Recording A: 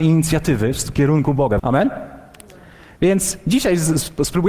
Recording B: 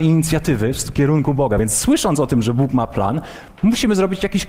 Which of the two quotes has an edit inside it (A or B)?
A